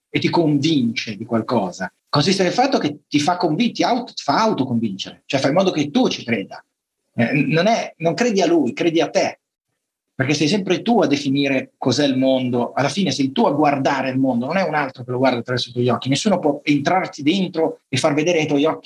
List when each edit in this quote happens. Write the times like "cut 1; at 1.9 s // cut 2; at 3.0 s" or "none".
cut 1; at 2.0 s